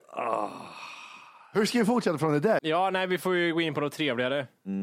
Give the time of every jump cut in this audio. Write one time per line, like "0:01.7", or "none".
0:02.6